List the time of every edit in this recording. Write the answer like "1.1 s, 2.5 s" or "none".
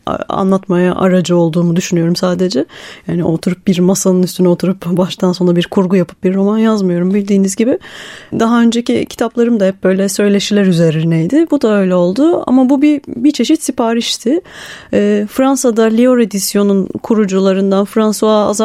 none